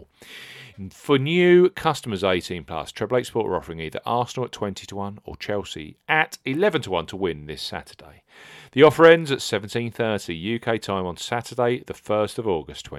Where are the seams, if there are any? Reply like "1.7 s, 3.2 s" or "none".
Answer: none